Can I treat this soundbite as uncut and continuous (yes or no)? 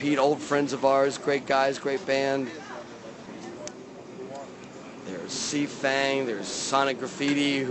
yes